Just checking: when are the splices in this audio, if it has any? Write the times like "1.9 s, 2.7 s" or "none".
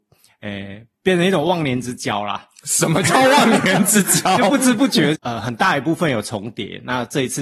5.1 s